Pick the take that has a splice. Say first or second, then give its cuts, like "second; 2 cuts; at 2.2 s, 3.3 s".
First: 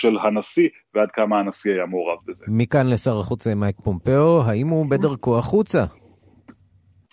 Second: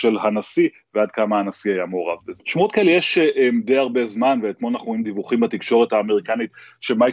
second; 1 cut; at 2.4 s